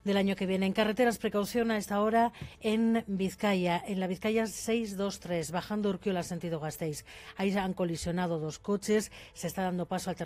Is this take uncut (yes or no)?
yes